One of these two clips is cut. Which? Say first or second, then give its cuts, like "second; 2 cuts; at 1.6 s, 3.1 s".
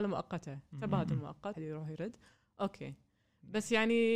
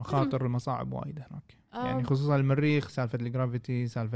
first; 1 cut; at 1.5 s